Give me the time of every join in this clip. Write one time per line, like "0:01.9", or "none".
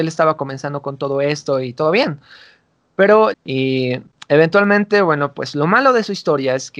0:03.3